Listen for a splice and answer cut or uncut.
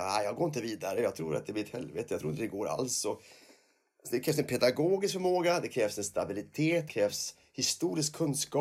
uncut